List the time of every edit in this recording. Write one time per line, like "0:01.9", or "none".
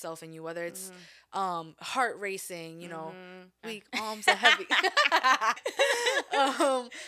0:03.6
0:05.6